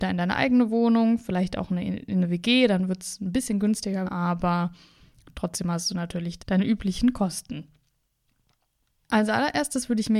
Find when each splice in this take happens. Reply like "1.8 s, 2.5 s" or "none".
4.1 s, 6.4 s